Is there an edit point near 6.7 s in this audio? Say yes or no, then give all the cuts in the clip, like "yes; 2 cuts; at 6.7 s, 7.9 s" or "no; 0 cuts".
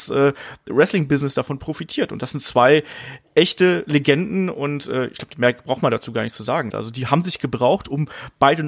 yes; 1 cut; at 6.7 s